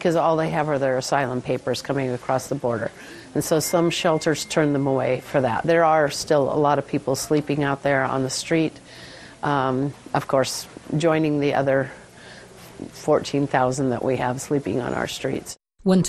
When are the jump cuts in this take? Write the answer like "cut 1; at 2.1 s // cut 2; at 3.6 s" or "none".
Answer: none